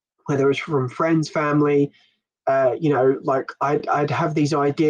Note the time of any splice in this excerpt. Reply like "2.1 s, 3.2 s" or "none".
none

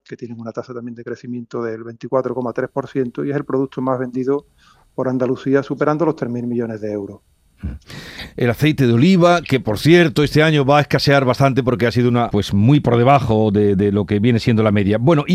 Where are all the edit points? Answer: 12.3 s

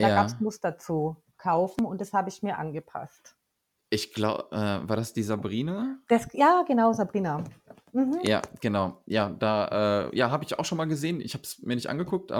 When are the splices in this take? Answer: none

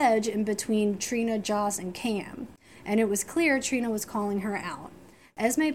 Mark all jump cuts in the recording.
none

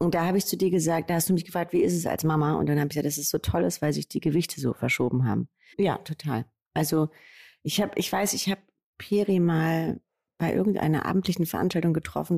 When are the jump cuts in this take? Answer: 5.7 s

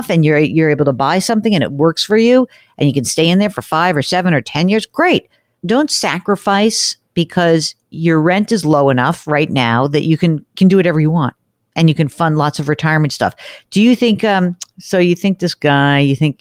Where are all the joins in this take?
none

